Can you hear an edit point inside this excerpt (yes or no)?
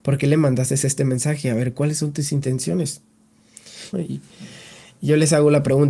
yes